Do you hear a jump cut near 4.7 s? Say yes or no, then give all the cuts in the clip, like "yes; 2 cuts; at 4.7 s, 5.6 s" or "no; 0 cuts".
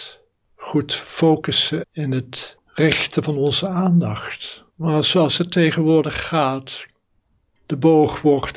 yes; 2 cuts; at 1.8 s, 4.7 s